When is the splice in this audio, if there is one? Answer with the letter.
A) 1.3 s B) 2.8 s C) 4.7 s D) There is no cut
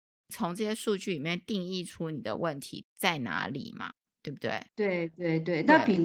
D